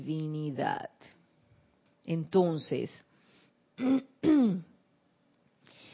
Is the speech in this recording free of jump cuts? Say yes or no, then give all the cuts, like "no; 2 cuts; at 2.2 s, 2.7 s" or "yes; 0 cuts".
no; 1 cut; at 1.9 s